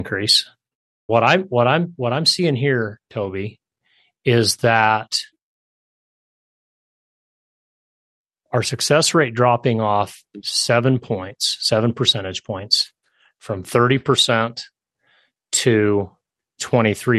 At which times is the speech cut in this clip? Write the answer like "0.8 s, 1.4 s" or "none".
1.1 s